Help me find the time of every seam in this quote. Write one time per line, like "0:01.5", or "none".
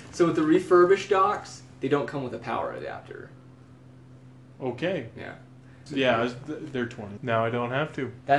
0:05.9
0:07.2